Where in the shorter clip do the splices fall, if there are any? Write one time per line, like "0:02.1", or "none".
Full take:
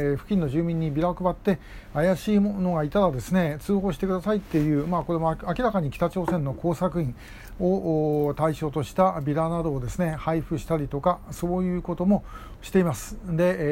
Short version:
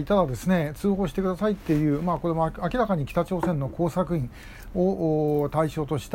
none

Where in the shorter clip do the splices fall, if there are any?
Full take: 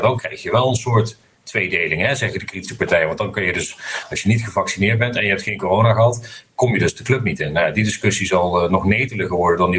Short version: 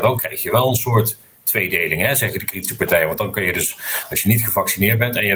none

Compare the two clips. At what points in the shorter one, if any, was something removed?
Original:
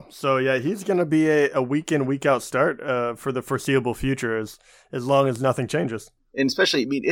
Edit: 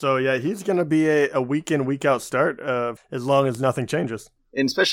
0:03.0

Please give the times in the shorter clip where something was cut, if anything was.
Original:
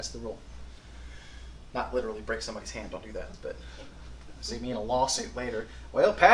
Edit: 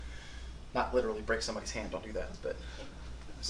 none

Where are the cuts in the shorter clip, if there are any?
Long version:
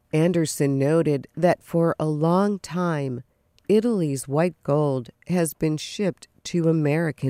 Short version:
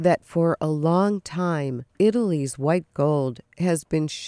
0:01.9

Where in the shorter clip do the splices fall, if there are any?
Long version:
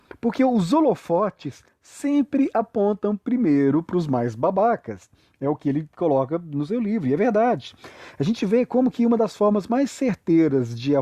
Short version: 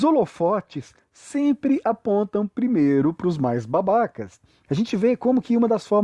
0:04.7

